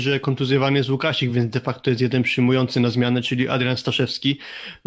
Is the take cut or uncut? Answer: uncut